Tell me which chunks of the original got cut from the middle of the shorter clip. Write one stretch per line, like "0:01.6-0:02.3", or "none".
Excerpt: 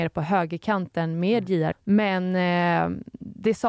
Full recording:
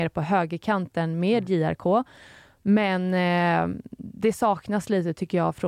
0:01.7-0:02.5